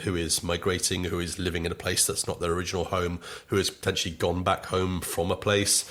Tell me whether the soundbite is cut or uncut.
uncut